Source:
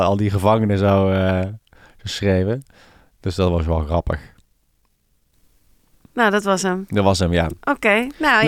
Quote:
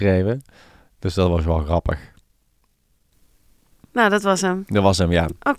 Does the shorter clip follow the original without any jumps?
yes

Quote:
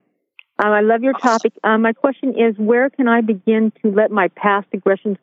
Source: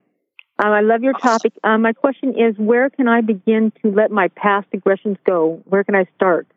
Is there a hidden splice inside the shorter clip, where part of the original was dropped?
no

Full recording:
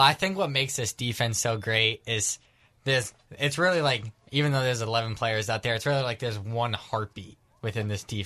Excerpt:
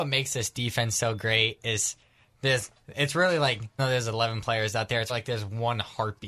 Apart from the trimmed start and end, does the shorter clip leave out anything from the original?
yes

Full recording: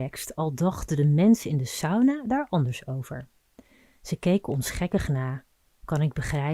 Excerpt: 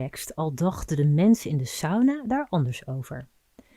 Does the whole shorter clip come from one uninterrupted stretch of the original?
yes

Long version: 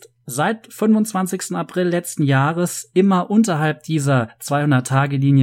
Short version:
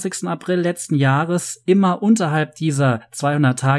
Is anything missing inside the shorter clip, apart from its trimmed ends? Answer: no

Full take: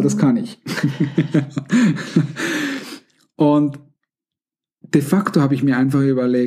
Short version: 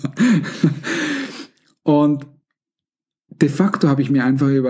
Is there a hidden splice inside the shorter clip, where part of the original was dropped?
no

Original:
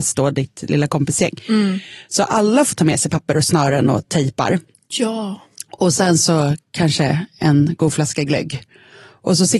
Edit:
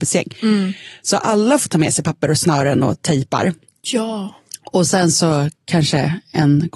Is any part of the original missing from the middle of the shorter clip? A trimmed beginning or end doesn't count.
no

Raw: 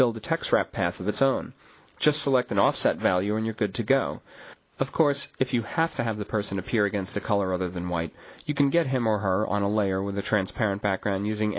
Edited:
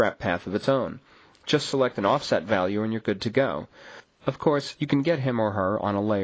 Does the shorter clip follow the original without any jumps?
no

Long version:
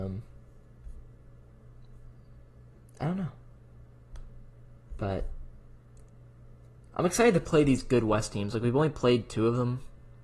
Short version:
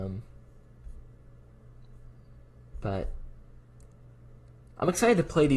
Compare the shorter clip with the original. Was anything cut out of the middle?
yes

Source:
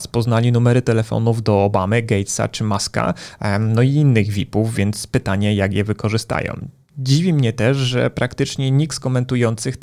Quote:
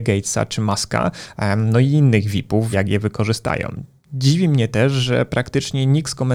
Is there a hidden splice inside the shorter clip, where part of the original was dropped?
yes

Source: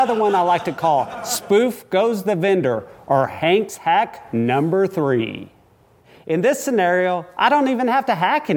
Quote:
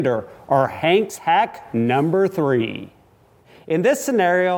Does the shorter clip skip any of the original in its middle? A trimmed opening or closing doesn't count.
no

